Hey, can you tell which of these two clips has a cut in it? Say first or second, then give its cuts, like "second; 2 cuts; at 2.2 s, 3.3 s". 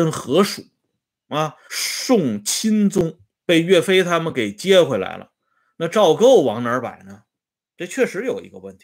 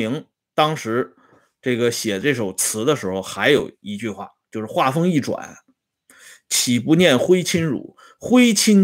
first; 1 cut; at 1.7 s